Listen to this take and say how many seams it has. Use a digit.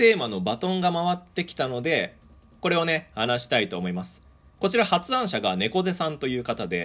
0